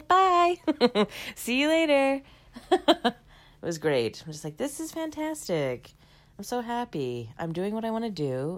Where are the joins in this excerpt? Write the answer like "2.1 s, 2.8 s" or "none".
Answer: none